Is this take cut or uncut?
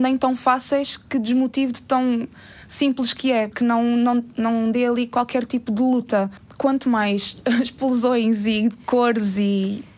uncut